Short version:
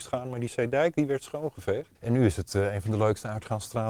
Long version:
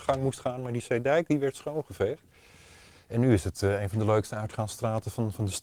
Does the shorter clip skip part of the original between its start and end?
yes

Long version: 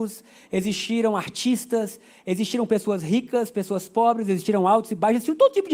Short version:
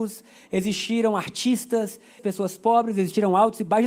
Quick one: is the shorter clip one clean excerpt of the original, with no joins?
no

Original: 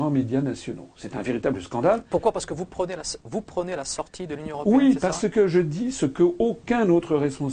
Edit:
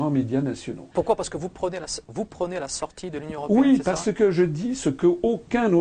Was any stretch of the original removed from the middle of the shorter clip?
yes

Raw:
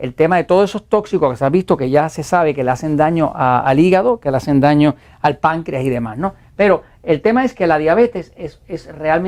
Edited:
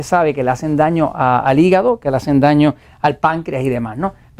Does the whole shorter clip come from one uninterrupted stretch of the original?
yes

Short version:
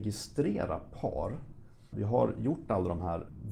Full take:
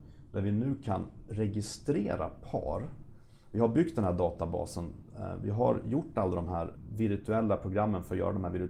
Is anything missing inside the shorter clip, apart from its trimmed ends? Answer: yes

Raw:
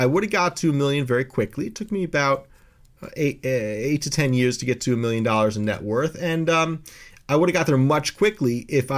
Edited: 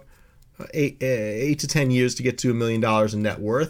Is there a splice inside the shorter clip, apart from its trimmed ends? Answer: no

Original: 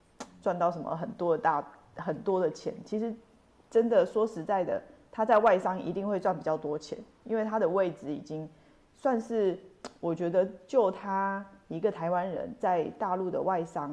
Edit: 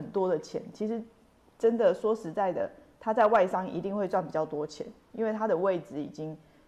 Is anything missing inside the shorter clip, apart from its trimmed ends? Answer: no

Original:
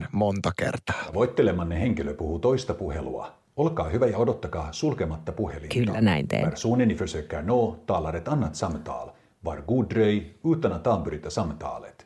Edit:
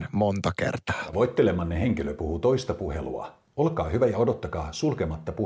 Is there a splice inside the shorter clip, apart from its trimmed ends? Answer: no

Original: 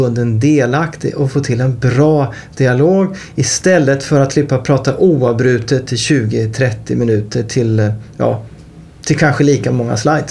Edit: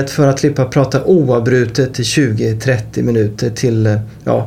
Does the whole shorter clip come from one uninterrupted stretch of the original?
yes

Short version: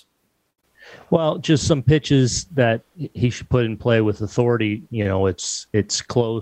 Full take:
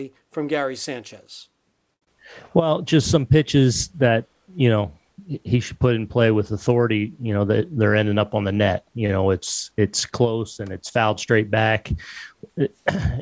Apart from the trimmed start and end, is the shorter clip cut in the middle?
yes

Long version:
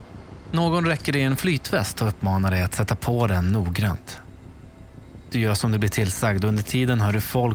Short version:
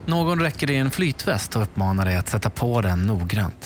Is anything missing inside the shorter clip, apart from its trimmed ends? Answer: no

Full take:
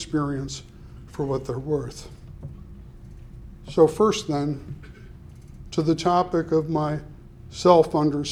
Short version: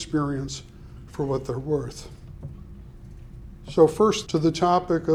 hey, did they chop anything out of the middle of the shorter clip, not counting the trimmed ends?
yes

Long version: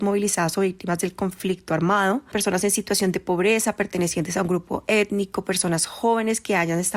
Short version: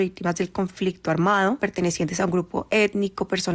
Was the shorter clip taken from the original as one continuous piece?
no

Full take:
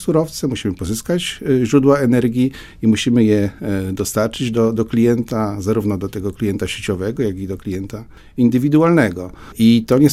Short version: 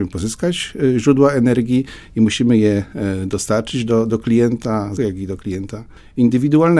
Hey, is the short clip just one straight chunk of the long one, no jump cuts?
no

